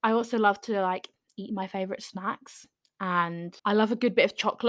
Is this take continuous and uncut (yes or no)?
no